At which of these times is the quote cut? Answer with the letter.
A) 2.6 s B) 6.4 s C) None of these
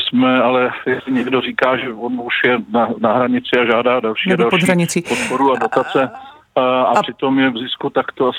C